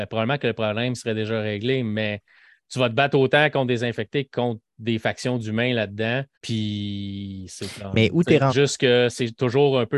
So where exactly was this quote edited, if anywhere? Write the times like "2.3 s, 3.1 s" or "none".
6.3 s, 8.5 s